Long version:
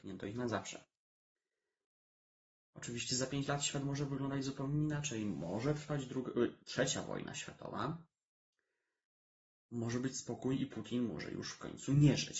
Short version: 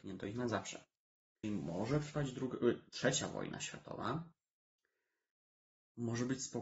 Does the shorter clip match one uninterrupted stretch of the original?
no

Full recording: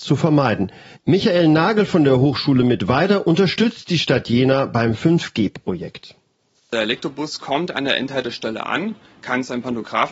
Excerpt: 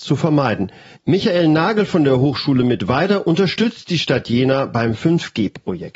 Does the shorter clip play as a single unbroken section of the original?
yes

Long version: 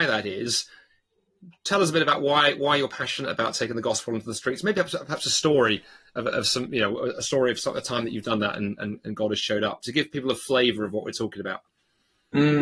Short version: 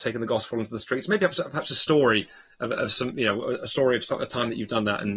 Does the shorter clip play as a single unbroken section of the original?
yes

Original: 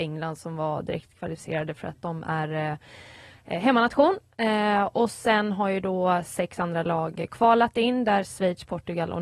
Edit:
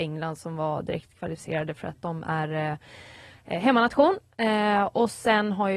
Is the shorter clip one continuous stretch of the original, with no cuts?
yes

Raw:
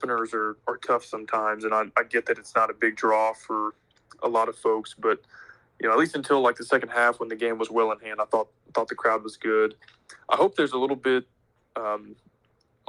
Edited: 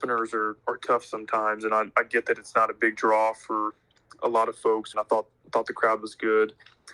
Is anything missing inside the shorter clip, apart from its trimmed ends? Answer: yes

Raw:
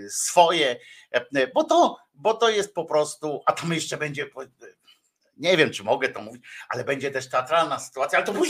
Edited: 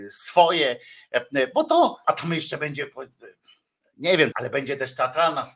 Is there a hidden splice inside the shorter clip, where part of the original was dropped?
yes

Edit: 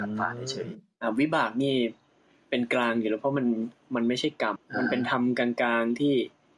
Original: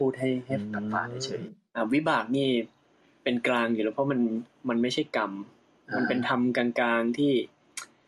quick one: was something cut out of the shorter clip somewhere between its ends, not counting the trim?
yes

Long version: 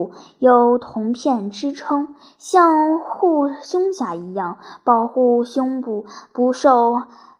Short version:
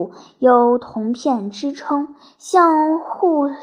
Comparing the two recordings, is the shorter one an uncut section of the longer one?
yes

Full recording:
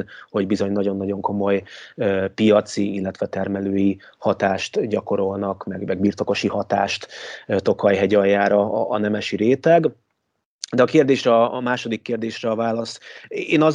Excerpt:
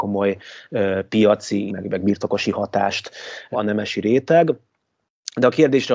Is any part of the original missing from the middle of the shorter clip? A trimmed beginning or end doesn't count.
yes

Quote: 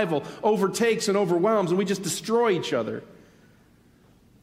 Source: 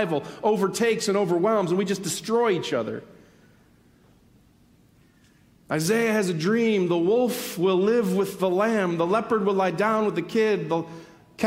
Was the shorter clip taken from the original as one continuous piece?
yes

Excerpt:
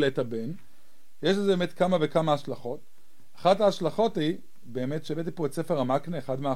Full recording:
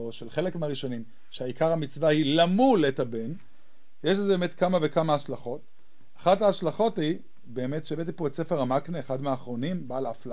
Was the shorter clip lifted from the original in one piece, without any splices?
yes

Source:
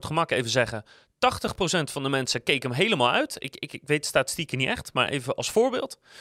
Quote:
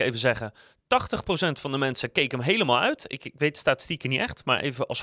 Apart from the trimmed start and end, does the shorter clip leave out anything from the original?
yes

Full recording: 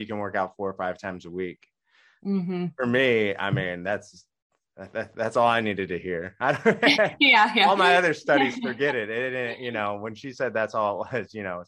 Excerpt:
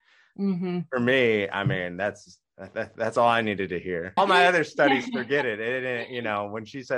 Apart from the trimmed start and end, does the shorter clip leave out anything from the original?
yes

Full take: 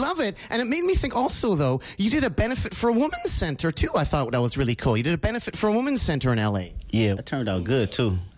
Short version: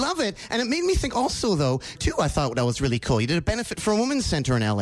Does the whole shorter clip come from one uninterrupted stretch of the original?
no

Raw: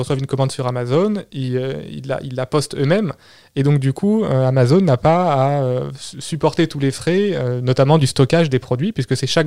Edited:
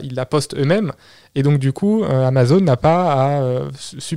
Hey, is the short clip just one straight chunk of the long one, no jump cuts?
yes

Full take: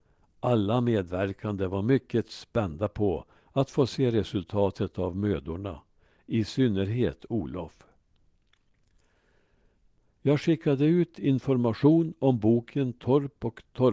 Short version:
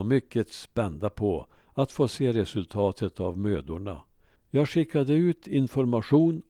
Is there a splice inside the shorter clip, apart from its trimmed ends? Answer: yes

